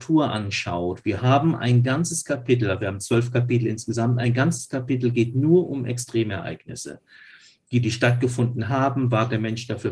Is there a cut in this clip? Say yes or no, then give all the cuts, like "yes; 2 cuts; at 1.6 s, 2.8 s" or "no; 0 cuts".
no; 0 cuts